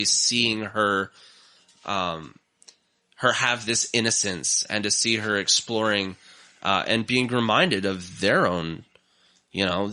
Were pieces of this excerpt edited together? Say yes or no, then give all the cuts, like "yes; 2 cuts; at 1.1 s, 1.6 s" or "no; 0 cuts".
no; 0 cuts